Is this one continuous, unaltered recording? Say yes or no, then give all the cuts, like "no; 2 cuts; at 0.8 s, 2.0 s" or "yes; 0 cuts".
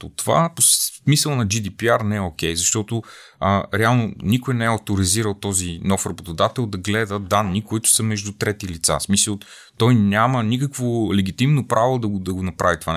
yes; 0 cuts